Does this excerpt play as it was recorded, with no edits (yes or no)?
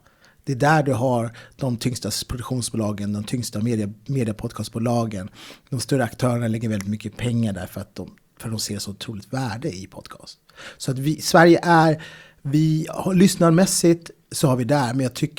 yes